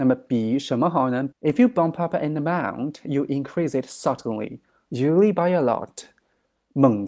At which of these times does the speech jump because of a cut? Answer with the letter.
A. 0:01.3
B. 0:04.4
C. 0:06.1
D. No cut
A